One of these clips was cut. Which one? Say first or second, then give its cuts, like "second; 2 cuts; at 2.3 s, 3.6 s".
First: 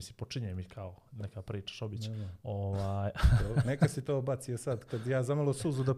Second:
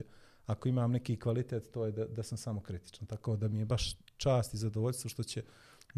first; 1 cut; at 2.4 s